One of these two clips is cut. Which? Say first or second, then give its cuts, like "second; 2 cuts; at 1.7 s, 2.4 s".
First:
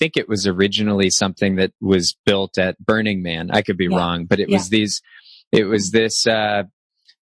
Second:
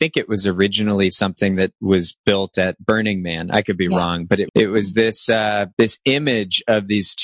second; 2 cuts; at 4.5 s, 5.7 s